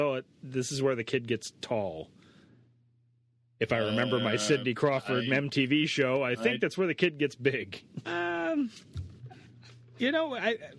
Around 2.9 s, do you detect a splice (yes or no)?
no